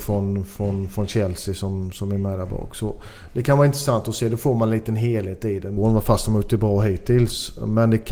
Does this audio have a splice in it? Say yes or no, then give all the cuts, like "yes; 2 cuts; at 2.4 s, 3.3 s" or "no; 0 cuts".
yes; 1 cut; at 5.8 s